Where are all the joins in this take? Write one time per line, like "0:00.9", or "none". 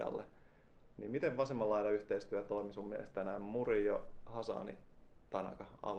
none